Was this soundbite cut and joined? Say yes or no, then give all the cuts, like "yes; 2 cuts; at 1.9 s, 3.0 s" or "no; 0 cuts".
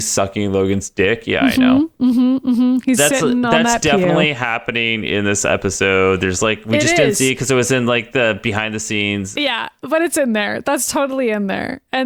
yes; 2 cuts; at 3.0 s, 9.3 s